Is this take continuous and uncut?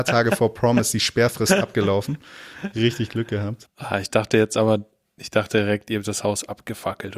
no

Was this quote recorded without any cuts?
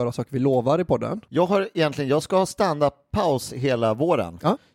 no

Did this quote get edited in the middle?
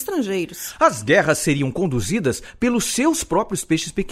no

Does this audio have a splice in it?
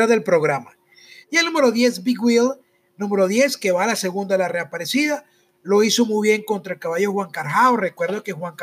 yes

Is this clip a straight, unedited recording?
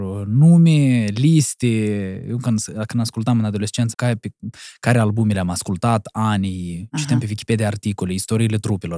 no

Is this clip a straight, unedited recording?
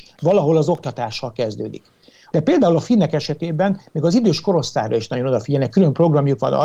no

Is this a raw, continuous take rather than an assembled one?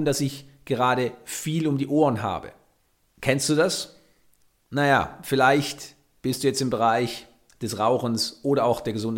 yes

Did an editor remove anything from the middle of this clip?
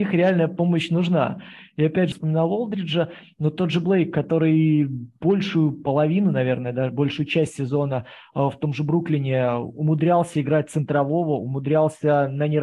yes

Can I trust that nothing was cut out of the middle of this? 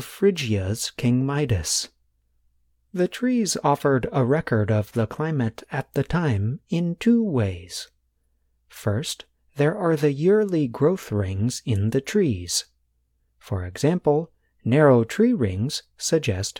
yes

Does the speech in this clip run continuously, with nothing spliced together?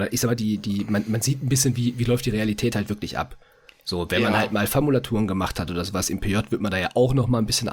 yes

